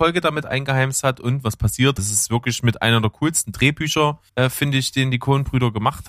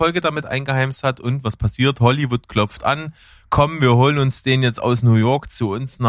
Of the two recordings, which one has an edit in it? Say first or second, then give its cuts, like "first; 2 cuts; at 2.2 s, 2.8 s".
first; 2 cuts; at 2.0 s, 4.3 s